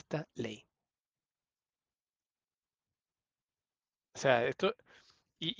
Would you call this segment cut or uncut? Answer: uncut